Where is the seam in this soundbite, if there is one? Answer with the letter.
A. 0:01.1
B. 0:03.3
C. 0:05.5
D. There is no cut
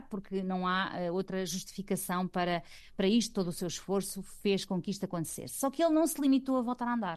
D